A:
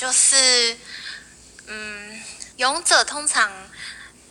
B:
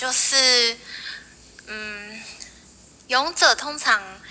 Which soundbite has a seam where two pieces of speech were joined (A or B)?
A